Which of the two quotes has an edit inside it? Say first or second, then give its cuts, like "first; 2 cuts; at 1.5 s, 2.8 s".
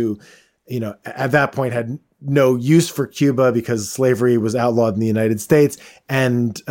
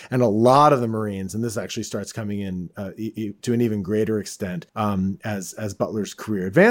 second; 1 cut; at 4.7 s